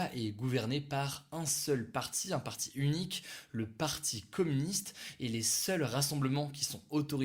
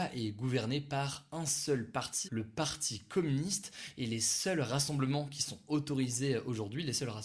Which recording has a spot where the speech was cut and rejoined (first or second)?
second